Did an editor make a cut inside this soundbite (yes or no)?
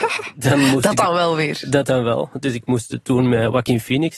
no